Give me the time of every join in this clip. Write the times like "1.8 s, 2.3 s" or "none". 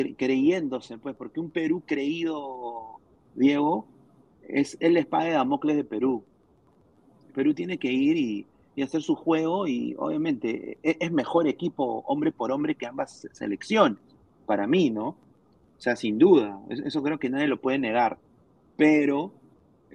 none